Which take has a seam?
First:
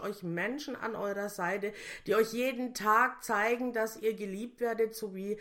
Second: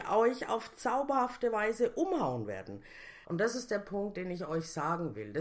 second; 1 cut; at 3.2 s

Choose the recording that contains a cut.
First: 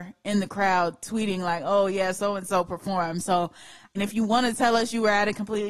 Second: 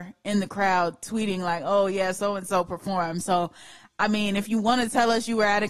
first; 1 cut; at 3.9 s

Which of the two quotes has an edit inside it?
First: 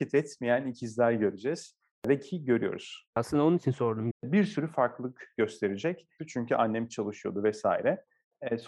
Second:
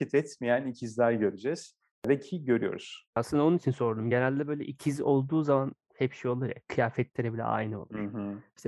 first; 2 cuts; at 4.1 s, 6.2 s

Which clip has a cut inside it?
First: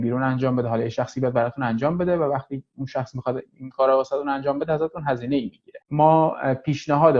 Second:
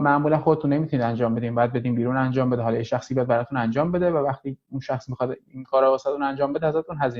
first; 1 cut; at 5.8 s

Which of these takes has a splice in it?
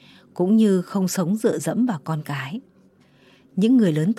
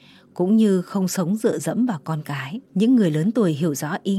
second; 1 cut; at 2.6 s

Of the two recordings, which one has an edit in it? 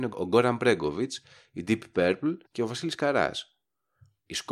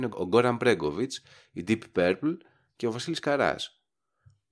first; 1 cut; at 2.4 s

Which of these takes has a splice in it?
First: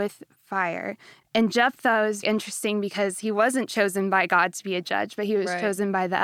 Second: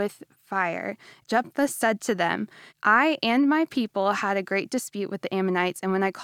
first; 2 cuts; at 1.2 s, 2.2 s

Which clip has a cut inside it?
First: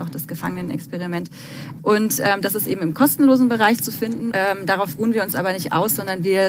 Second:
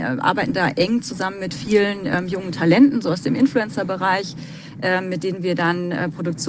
first; 2 cuts; at 1.8 s, 4.3 s

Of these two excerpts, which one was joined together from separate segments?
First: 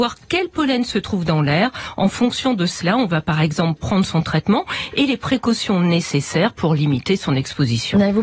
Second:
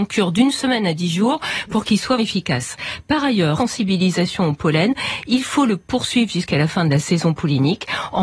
second; 2 cuts; at 2.2 s, 3.6 s

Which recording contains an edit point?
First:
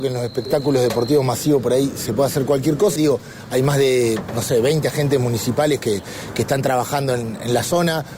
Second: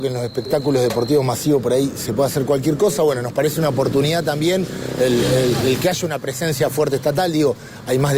first; 1 cut; at 3.0 s

